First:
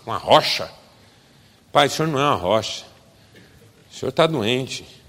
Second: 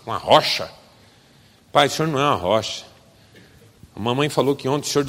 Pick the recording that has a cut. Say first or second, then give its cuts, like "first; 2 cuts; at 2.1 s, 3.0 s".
second; 1 cut; at 3.8 s